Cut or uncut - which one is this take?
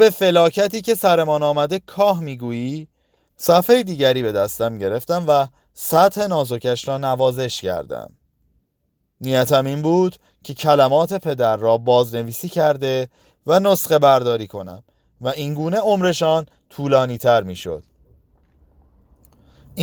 cut